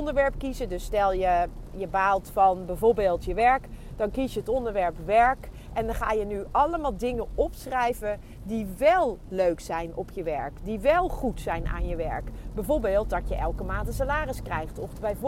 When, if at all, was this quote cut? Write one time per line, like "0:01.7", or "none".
0:01.7